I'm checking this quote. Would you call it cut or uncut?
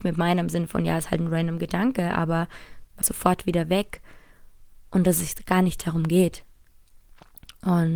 cut